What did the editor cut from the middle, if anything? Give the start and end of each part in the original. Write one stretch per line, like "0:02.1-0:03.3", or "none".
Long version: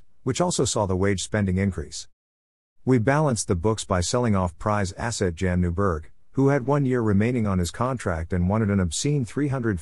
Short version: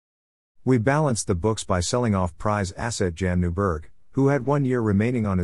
none